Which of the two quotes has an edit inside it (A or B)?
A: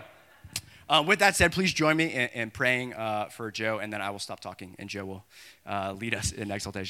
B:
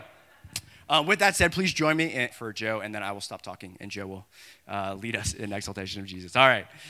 B